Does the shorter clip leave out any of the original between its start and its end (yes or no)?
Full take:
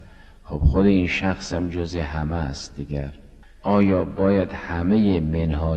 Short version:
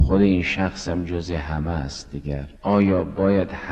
yes